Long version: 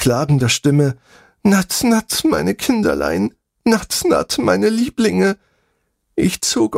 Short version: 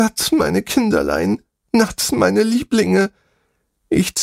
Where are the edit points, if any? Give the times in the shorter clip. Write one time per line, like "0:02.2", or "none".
0:02.1